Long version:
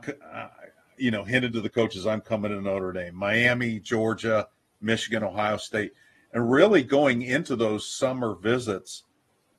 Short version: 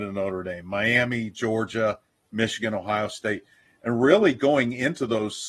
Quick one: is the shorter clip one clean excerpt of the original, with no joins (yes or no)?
yes